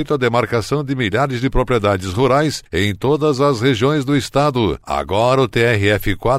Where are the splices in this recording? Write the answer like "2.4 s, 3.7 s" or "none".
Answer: 4.8 s